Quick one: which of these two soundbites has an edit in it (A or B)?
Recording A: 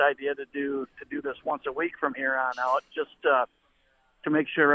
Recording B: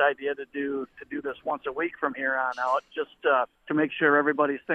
B